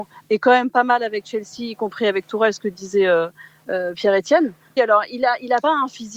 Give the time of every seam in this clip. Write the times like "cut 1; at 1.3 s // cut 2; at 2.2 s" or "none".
cut 1; at 4.8 s